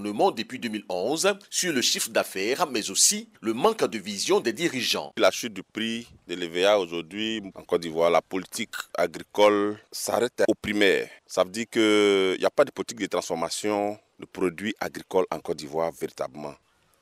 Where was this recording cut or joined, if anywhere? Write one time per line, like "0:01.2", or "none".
0:07.5